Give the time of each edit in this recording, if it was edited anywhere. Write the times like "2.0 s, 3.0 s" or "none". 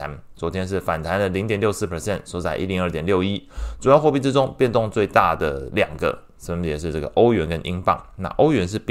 none